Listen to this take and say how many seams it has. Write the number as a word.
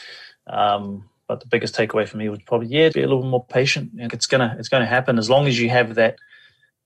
two